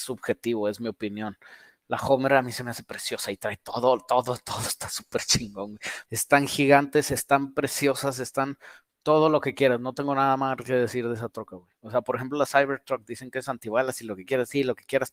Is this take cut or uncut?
cut